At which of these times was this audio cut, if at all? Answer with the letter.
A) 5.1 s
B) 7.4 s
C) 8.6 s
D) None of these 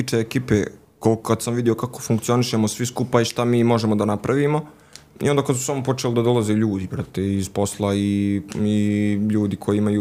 D